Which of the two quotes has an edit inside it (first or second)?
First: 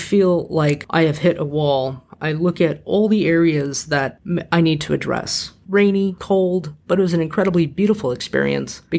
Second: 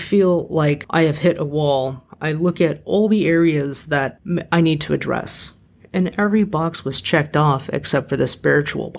first